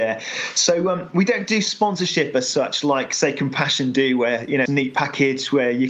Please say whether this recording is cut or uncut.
cut